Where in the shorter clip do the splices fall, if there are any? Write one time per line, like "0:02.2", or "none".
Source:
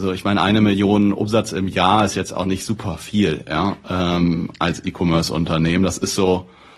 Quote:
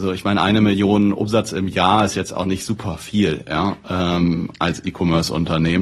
none

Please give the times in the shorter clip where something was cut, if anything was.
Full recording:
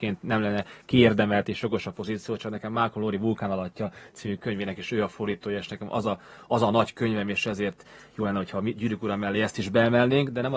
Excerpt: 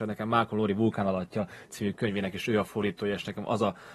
none

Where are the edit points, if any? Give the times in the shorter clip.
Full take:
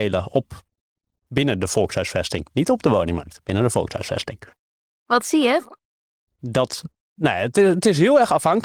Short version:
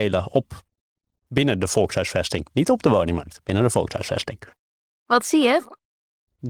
none

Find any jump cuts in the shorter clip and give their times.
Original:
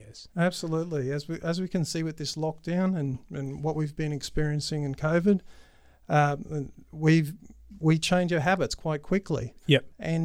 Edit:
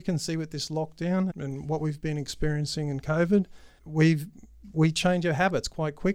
0:01.3
0:03.8

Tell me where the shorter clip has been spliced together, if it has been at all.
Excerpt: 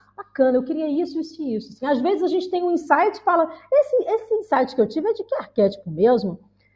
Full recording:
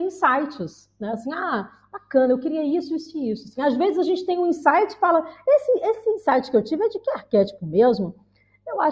none

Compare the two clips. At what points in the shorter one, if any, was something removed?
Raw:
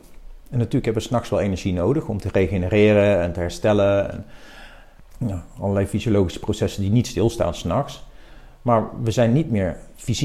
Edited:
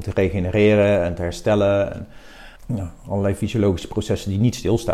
0:02.6

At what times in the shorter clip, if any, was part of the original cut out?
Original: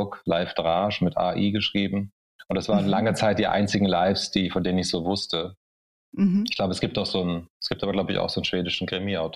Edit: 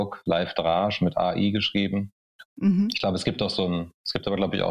0:02.5

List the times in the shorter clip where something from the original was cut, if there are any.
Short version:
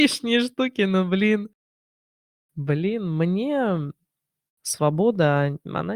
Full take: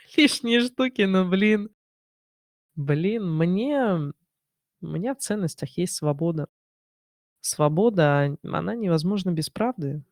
0:04.5

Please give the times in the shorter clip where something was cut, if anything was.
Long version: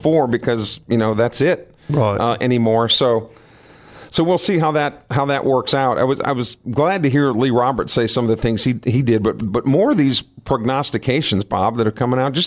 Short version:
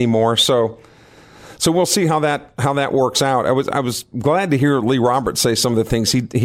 none

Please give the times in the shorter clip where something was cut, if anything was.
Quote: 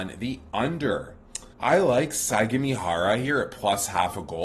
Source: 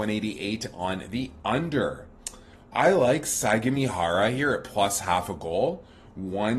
0:01.5

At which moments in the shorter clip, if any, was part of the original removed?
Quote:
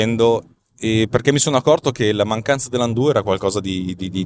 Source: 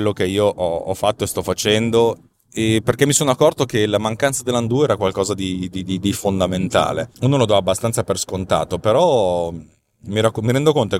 none

